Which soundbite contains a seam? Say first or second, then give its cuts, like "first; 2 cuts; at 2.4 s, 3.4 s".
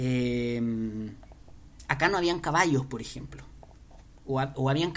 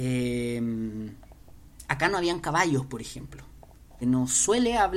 second; 1 cut; at 4.0 s